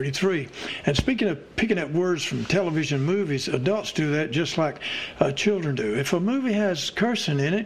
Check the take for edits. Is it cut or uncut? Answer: uncut